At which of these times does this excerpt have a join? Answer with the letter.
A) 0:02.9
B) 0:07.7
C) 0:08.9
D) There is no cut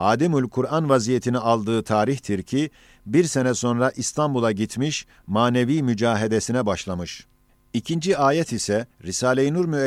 C